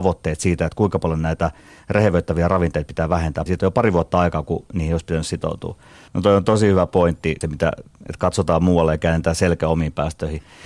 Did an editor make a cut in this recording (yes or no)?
yes